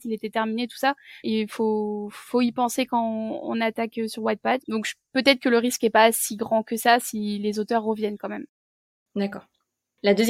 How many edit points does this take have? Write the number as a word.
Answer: two